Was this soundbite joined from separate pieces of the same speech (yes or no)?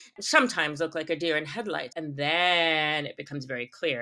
yes